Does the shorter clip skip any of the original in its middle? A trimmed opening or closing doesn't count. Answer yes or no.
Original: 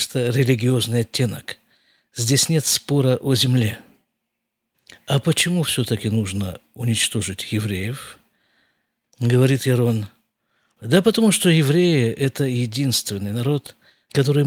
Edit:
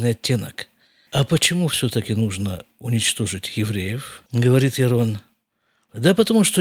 yes